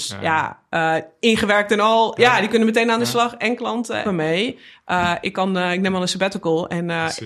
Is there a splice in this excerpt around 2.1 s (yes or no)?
yes